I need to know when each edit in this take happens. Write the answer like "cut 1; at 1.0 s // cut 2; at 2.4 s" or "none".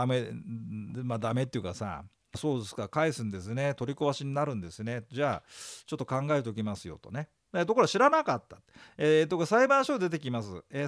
cut 1; at 2.3 s